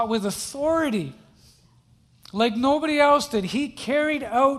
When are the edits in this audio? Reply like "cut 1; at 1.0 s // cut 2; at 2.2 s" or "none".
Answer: none